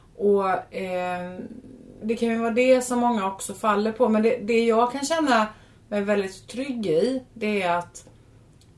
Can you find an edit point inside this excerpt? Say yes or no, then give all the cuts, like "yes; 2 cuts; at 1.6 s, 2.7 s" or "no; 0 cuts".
yes; 1 cut; at 2.0 s